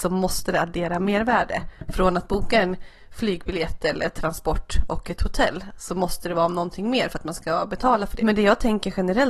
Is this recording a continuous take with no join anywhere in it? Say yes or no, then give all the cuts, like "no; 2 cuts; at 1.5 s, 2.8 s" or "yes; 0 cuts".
no; 1 cut; at 8.2 s